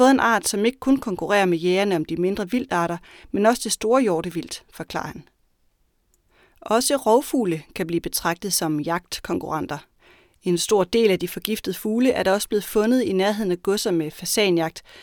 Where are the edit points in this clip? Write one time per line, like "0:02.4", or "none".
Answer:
none